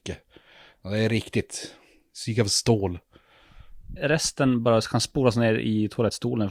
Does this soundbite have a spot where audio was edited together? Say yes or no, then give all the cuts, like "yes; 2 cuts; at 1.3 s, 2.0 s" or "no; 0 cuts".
yes; 1 cut; at 4.0 s